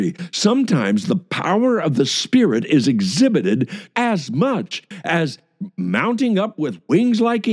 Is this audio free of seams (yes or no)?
no